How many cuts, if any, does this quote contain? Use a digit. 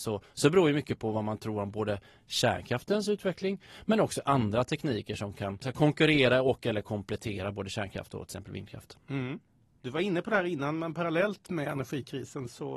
0